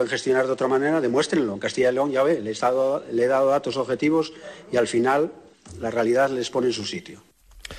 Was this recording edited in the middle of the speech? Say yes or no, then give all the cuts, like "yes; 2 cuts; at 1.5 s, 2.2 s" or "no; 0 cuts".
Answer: no; 0 cuts